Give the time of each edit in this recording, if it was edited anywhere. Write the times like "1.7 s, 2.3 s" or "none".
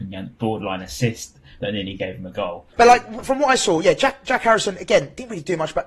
2.7 s